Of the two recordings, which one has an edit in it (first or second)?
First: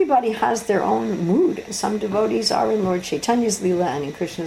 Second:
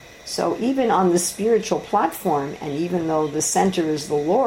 first